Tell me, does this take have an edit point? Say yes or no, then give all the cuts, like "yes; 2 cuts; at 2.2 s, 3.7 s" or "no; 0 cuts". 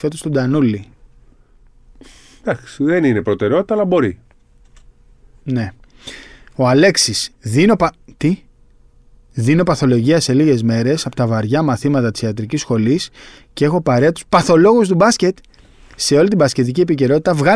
no; 0 cuts